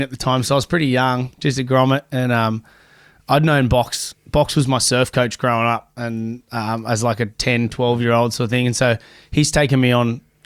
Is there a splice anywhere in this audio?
no; 0 cuts

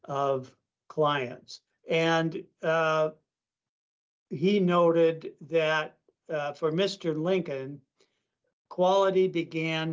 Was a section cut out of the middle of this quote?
yes; 1 cut; at 1.7 s

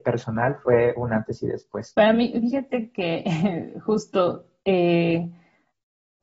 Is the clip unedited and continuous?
no; 1 cut; at 1.9 s

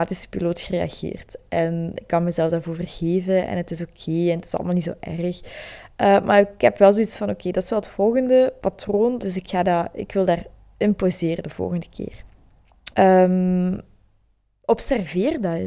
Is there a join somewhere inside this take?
yes; 2 cuts; at 9.2 s, 12.9 s

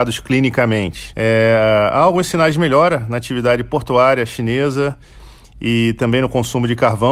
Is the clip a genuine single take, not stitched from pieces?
no; 1 cut; at 1.1 s

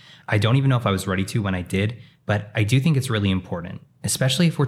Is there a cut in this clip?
no; 0 cuts

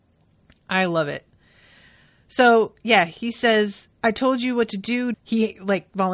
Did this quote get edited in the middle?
yes; 2 cuts; at 3.9 s, 5.1 s

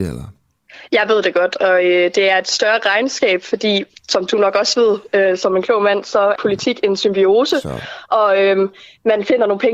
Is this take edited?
yes; 1 cut; at 6.4 s

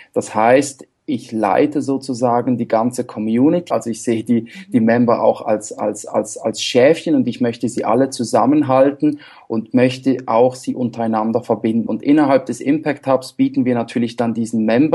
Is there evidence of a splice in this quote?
yes; 2 cuts; at 3.7 s, 11.9 s

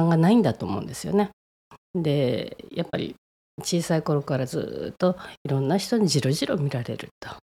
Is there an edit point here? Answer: no; 0 cuts

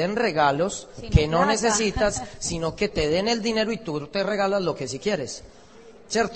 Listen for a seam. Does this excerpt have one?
no; 0 cuts

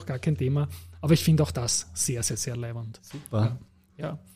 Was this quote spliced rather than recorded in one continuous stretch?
no; 0 cuts

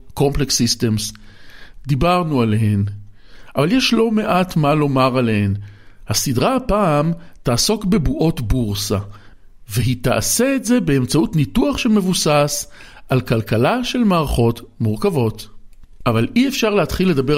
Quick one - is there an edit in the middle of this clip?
no; 0 cuts

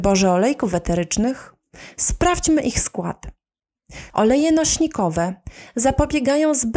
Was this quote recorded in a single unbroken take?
no; 1 cut; at 4.1 s

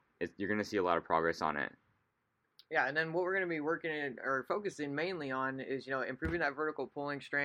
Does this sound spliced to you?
no; 0 cuts

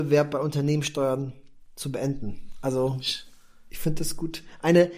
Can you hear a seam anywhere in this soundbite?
no; 0 cuts

